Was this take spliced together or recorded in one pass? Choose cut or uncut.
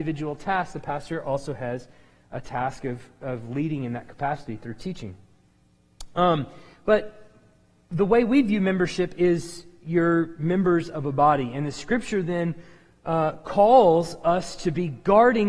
uncut